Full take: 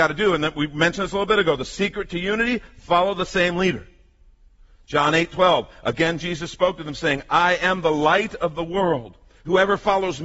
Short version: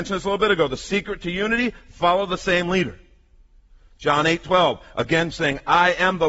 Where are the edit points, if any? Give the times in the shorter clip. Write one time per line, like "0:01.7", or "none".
0:05.3